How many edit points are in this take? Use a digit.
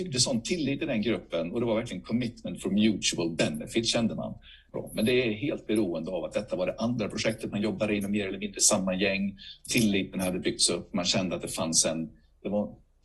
1